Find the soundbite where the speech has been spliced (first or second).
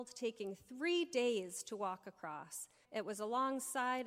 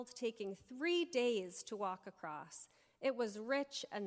first